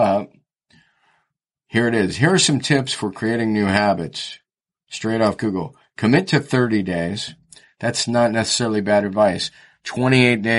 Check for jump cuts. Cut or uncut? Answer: uncut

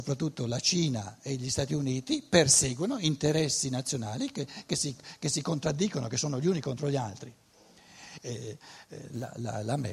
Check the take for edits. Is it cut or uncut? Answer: cut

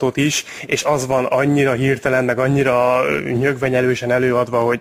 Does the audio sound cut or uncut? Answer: uncut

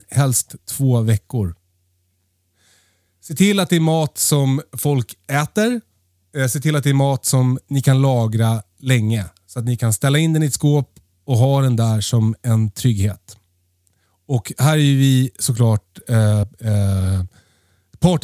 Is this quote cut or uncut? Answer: uncut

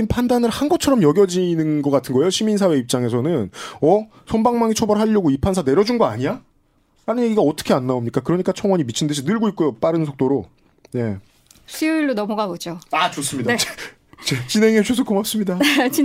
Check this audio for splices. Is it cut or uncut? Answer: uncut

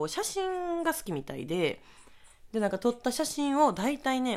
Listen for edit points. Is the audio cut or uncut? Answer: uncut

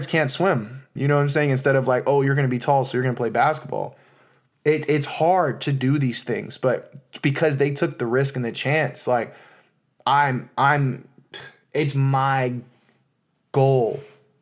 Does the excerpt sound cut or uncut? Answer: cut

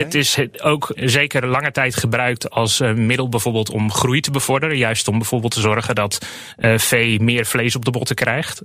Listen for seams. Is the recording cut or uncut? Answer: cut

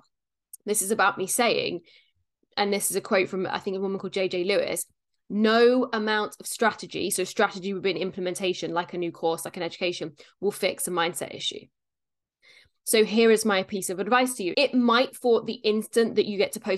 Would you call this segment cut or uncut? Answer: cut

